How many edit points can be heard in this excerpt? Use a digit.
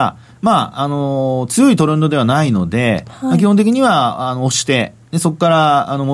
0